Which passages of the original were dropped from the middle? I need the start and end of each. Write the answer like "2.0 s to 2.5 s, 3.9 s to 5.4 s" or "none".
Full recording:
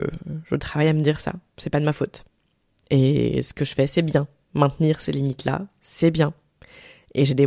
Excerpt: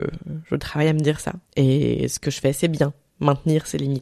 1.5 s to 2.8 s